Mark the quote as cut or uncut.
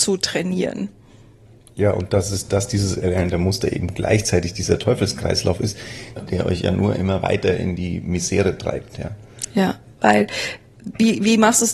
cut